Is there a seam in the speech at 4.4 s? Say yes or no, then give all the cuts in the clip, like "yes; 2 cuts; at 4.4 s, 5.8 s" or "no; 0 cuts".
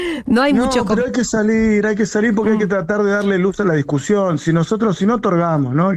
no; 0 cuts